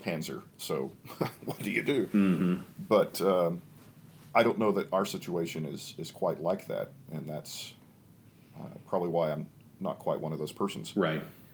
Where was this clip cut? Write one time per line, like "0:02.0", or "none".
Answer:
none